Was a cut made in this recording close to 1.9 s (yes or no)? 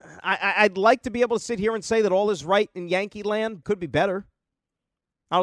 no